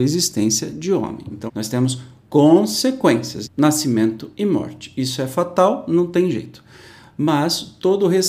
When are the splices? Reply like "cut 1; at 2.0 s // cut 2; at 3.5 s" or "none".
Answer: cut 1; at 1.5 s // cut 2; at 3.4 s